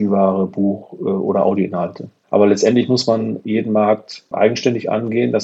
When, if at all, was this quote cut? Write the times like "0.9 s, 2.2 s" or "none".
2.2 s